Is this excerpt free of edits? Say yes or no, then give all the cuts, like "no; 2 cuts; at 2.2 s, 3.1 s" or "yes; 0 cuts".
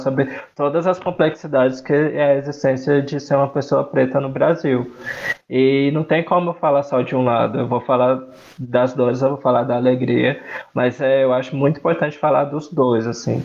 yes; 0 cuts